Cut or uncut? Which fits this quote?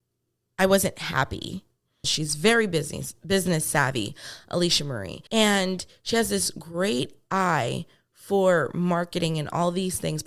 cut